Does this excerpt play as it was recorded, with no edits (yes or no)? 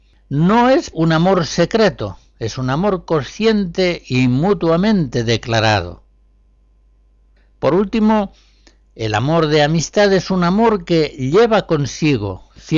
no